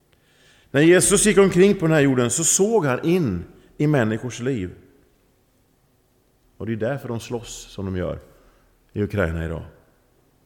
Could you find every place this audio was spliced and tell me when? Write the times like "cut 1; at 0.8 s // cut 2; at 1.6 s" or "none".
cut 1; at 6.4 s